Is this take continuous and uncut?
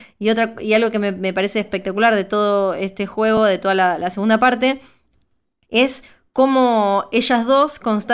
yes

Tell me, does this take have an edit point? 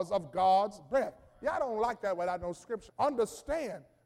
yes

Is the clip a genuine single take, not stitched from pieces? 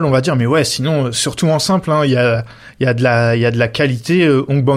yes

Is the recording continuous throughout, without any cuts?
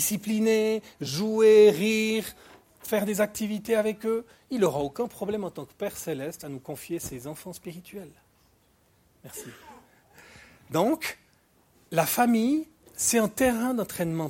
yes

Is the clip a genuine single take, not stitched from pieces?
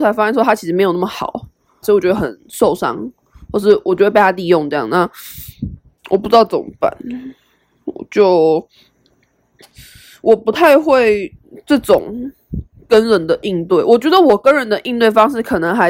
no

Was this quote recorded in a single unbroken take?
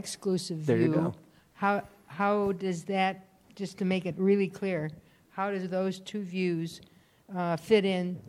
yes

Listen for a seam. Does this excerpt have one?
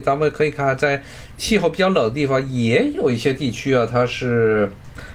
no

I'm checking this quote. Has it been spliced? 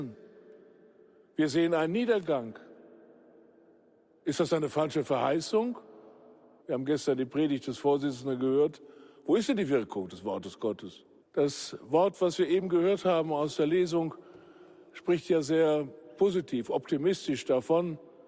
yes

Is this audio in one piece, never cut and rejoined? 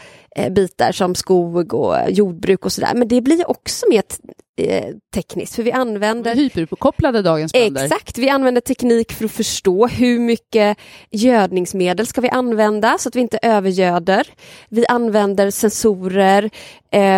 yes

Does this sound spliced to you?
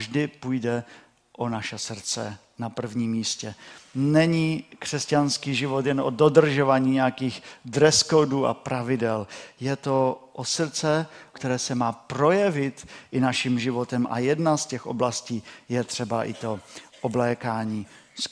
yes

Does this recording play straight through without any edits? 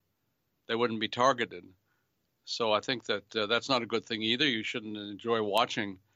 yes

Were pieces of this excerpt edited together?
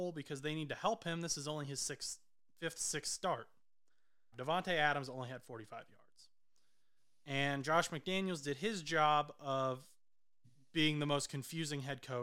yes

